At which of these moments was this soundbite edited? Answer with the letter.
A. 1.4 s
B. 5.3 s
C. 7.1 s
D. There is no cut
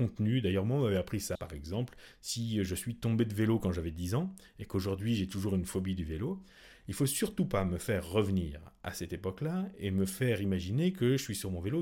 A